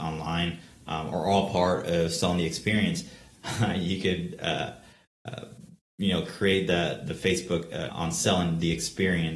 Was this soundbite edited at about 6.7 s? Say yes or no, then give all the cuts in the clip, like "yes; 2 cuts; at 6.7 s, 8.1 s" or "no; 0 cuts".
no; 2 cuts; at 3.4 s, 7.9 s